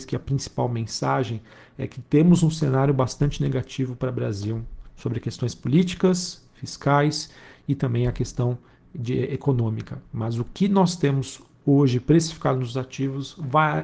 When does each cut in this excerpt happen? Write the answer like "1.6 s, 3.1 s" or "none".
none